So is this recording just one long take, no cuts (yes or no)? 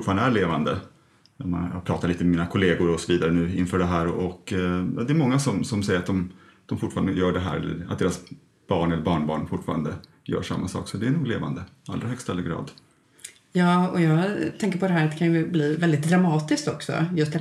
yes